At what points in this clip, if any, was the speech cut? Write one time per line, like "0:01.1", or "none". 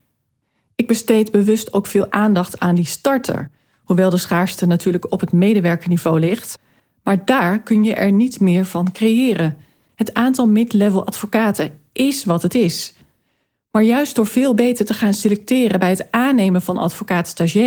none